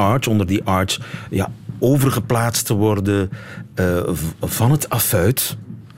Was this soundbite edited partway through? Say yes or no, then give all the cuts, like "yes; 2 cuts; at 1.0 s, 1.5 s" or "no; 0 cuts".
no; 0 cuts